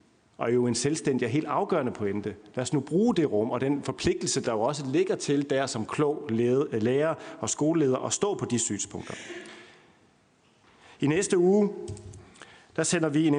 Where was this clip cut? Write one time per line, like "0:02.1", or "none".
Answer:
none